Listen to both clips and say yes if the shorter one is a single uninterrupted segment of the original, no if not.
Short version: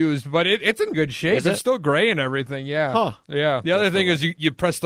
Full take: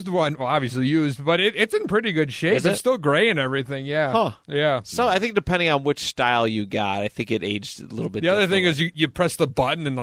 no